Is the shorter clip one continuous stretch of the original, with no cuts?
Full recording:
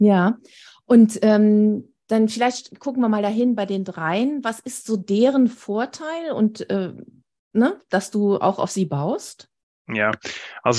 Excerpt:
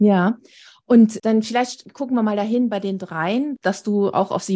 no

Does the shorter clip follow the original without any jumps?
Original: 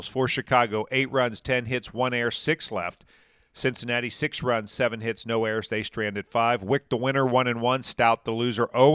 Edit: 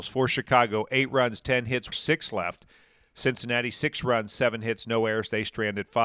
no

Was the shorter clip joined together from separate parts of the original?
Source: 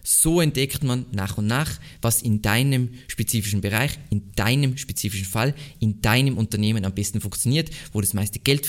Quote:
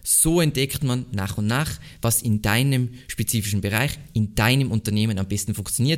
yes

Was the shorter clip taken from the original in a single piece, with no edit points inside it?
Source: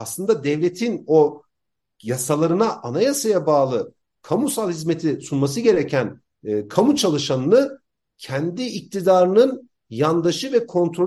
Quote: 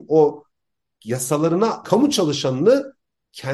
no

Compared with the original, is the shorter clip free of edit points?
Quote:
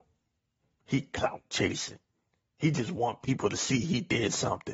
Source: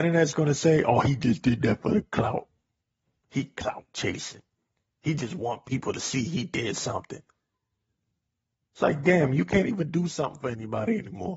yes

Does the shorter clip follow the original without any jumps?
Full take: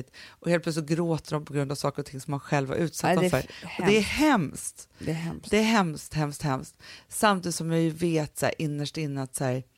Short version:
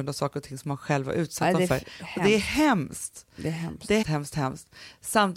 no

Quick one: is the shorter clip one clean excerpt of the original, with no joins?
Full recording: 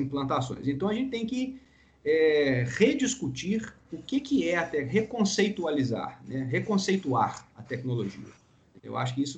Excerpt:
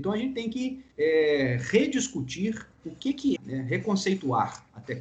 no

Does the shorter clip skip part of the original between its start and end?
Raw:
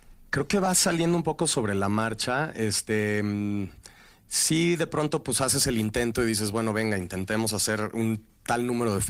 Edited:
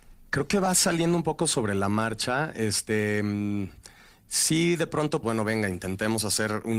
yes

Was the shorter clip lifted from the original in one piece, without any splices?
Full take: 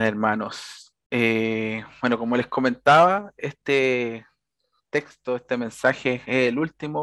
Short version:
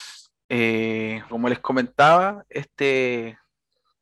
no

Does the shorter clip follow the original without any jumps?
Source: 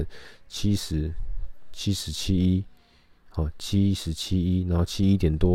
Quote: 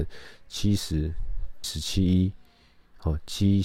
no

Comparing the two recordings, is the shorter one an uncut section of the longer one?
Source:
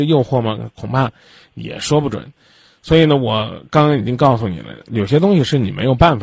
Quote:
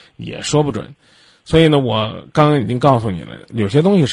yes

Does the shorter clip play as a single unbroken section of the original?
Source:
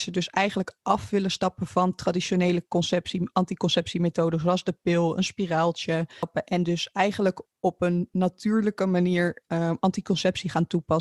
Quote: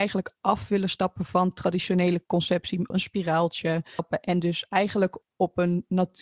no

